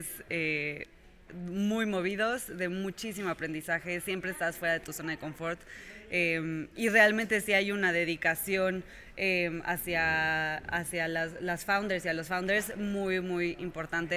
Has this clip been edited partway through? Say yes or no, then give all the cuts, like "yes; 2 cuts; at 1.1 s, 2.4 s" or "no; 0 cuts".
no; 0 cuts